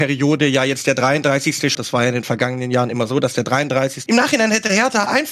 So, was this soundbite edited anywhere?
yes; 2 cuts; at 1.7 s, 4.1 s

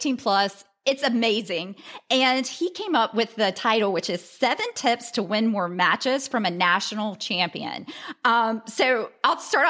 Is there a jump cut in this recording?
no; 0 cuts

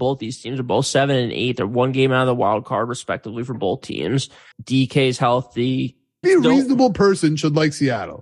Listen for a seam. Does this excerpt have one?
yes; 2 cuts; at 4.5 s, 6.2 s

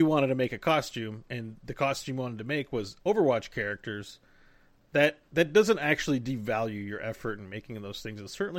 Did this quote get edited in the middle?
no; 0 cuts

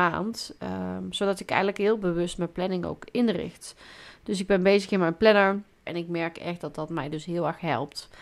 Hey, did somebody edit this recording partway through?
yes; 1 cut; at 5.9 s

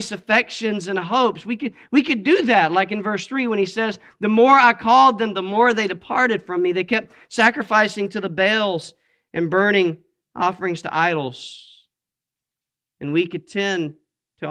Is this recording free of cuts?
yes; 0 cuts

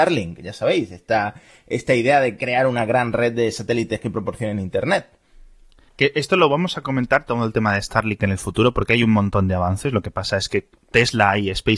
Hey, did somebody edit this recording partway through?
no; 0 cuts

